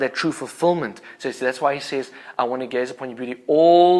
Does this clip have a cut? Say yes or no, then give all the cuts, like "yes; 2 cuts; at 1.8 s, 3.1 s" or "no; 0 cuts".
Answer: no; 0 cuts